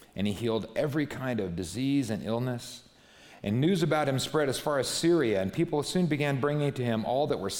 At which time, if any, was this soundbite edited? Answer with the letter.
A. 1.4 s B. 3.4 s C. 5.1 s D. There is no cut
D